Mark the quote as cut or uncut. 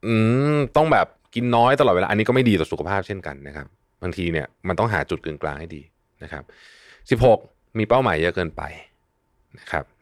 uncut